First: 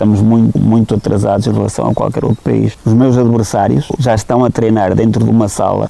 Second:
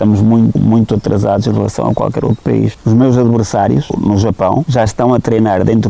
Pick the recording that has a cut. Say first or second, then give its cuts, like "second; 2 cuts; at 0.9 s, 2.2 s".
first; 1 cut; at 4.0 s